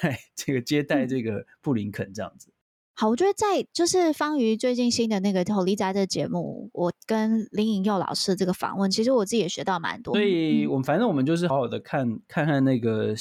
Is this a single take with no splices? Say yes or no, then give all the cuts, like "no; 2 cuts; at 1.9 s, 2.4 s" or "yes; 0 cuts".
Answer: no; 2 cuts; at 10.1 s, 11.5 s